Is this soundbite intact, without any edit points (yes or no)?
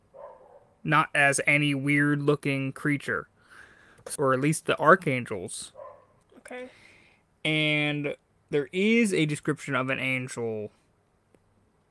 no